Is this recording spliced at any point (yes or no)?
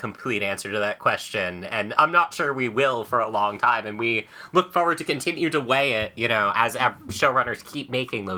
no